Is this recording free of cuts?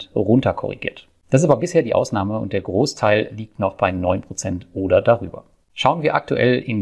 no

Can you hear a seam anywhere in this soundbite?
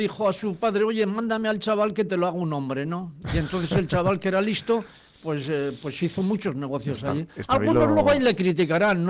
no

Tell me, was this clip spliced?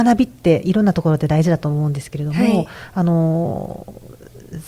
no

